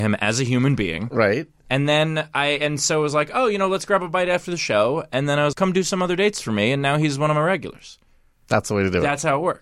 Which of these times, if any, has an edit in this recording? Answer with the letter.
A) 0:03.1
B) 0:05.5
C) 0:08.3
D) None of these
B